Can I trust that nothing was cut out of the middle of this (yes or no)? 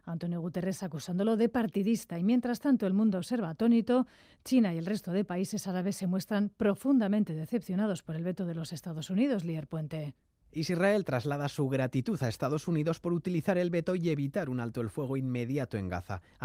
yes